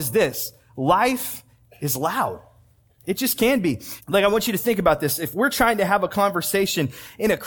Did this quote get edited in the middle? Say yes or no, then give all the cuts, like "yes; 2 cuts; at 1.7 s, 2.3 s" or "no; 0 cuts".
yes; 1 cut; at 4.0 s